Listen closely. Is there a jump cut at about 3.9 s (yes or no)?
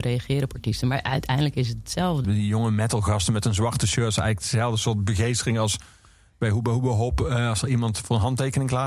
no